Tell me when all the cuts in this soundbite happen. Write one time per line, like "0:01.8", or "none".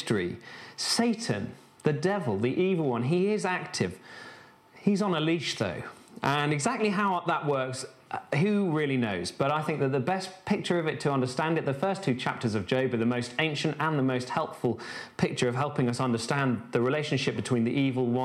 none